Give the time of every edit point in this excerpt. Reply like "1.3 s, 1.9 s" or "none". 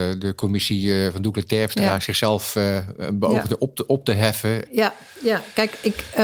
4.7 s